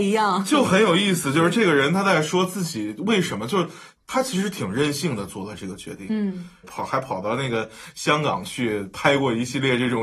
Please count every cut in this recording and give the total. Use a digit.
2